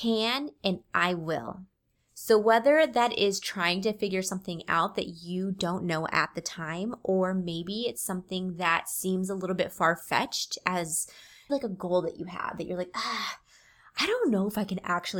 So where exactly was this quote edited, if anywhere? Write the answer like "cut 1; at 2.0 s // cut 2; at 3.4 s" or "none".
cut 1; at 11.5 s